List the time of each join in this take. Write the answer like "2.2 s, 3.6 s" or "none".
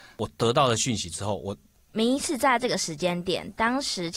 1.8 s

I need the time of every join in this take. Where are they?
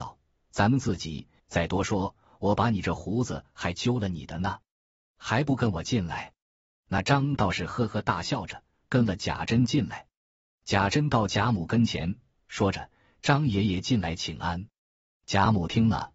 1.4 s, 12.3 s

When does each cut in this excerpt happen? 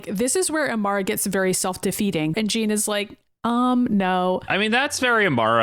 2.3 s

